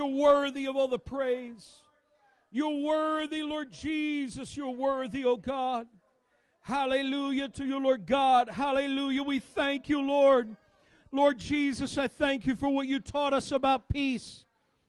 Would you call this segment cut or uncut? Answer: uncut